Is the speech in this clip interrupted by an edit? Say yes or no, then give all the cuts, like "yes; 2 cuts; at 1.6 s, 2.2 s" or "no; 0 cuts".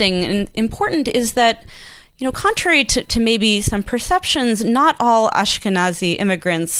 yes; 1 cut; at 3.0 s